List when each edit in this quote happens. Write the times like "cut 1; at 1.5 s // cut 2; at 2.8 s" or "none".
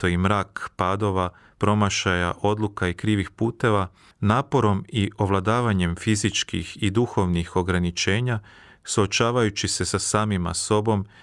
none